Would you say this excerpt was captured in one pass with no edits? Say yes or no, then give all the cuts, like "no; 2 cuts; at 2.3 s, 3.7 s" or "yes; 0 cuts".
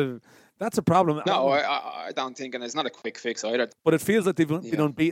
no; 2 cuts; at 1.2 s, 3.7 s